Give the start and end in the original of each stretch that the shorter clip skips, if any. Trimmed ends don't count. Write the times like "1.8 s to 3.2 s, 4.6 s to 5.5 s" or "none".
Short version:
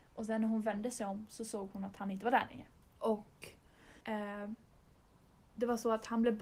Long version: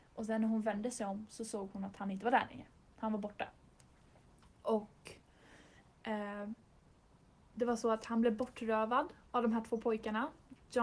2.8 s to 4.5 s, 5.6 s to 6.0 s